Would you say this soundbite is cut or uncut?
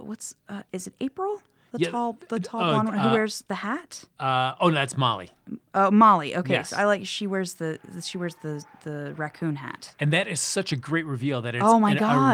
uncut